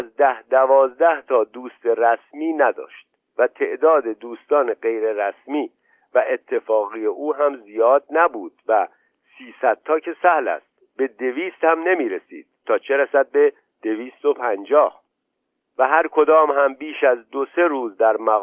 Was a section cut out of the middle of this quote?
no; 0 cuts

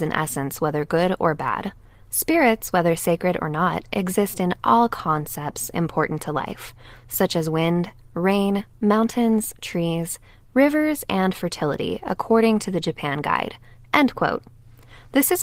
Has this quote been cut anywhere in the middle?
no; 0 cuts

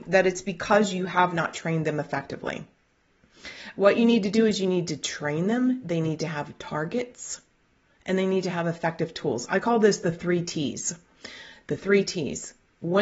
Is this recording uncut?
yes; 0 cuts

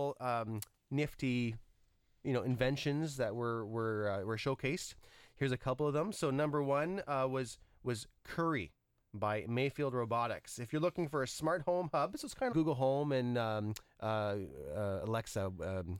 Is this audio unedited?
no; 1 cut; at 12.5 s

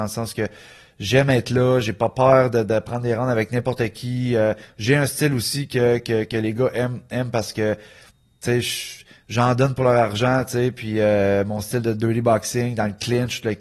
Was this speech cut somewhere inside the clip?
no; 0 cuts

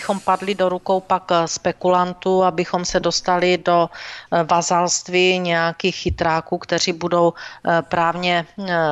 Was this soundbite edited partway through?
no; 0 cuts

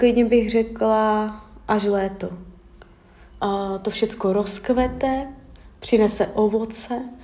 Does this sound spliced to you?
yes; 1 cut; at 3.4 s

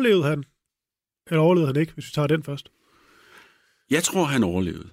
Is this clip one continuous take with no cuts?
yes; 0 cuts

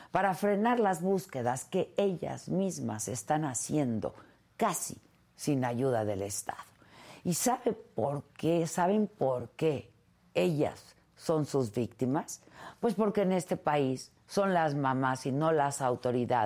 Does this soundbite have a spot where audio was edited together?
no; 0 cuts

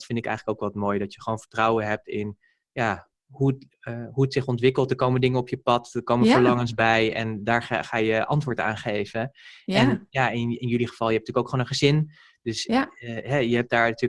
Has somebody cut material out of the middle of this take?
no; 0 cuts

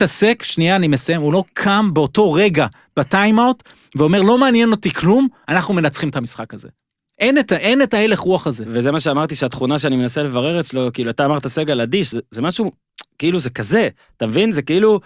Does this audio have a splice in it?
no; 0 cuts

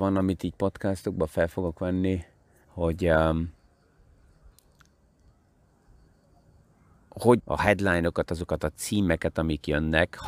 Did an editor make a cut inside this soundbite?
yes; 2 cuts; at 2.6 s, 7.4 s

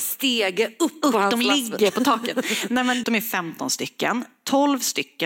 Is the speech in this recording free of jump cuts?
no; 1 cut; at 3.0 s

